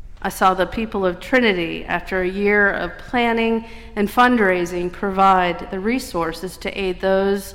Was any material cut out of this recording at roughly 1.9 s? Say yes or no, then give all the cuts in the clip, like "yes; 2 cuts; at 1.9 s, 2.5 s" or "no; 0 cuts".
no; 0 cuts